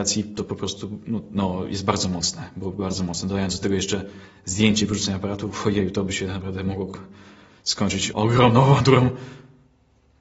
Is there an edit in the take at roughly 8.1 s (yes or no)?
yes